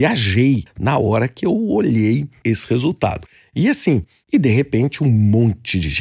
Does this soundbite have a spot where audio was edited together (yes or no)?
no